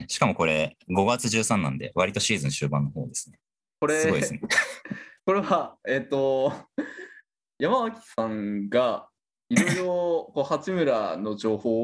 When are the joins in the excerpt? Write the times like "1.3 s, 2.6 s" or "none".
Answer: none